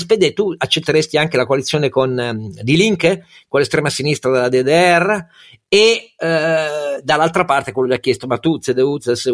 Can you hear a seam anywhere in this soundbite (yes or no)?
no